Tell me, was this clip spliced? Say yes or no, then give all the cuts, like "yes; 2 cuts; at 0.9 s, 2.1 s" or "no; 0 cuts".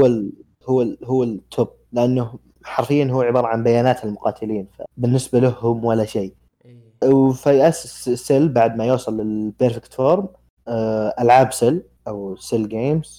yes; 1 cut; at 7.0 s